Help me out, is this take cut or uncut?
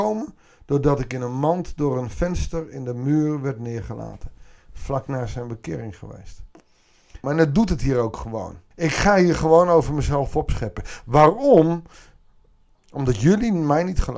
cut